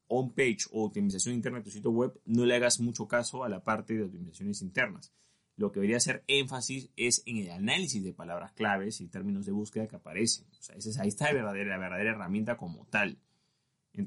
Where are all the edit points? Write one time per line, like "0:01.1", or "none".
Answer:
none